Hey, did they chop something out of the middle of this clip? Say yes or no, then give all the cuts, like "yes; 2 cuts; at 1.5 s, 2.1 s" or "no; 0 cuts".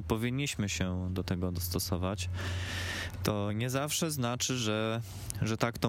no; 0 cuts